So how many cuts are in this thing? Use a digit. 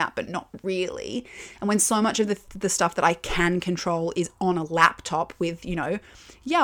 0